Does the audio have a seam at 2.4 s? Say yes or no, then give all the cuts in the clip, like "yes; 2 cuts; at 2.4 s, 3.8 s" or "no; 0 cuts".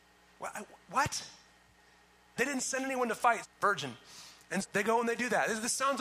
yes; 3 cuts; at 2.4 s, 3.4 s, 4.6 s